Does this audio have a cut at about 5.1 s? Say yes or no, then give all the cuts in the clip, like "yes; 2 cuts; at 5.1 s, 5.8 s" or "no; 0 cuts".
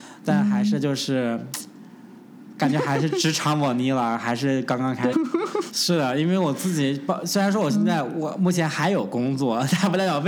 yes; 1 cut; at 5.1 s